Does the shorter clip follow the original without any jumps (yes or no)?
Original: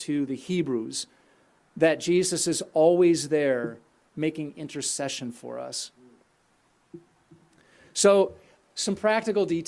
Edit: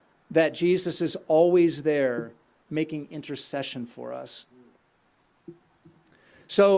yes